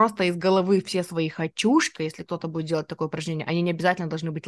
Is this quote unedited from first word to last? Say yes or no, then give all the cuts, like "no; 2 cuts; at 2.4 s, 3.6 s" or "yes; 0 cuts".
no; 1 cut; at 2.0 s